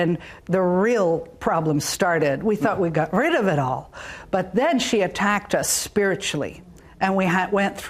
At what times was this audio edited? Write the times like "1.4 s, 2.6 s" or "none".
none